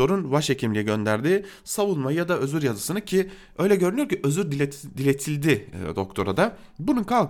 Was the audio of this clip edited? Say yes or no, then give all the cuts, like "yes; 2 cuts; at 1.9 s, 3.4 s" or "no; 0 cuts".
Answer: no; 0 cuts